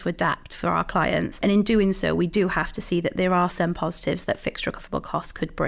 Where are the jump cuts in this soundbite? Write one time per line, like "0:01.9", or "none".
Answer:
none